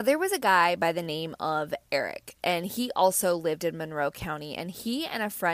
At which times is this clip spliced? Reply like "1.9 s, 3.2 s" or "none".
none